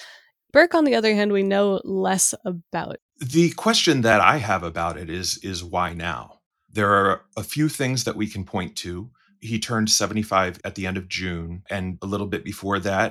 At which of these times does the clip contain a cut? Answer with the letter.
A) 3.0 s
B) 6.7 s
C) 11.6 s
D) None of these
A